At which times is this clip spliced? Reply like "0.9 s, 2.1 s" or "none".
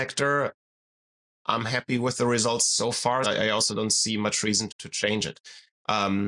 3.2 s, 4.7 s